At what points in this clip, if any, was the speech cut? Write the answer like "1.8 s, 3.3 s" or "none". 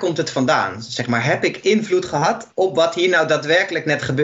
2.5 s